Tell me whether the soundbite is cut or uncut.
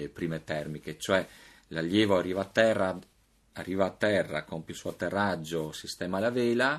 uncut